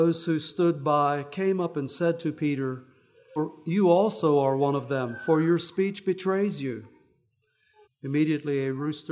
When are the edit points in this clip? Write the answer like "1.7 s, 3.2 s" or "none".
3.4 s, 7.8 s